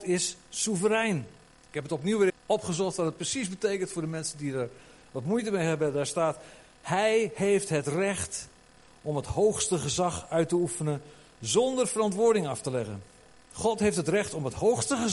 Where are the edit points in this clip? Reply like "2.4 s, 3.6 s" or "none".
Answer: 2.3 s